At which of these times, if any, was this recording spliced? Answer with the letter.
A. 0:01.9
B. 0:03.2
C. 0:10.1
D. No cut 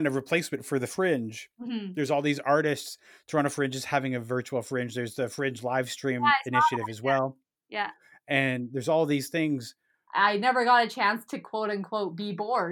C